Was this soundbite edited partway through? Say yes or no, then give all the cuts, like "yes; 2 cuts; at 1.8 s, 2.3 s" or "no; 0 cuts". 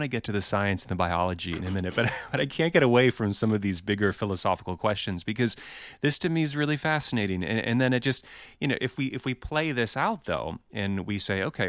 no; 0 cuts